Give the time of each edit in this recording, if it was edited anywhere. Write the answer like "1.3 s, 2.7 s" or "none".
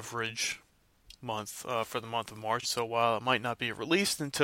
2.6 s